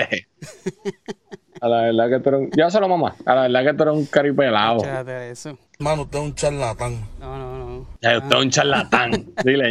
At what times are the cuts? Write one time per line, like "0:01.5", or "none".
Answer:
0:05.7